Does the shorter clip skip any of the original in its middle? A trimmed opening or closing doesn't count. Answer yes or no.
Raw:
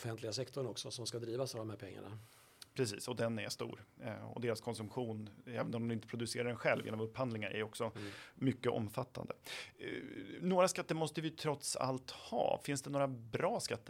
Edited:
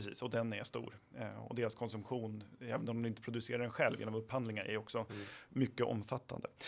no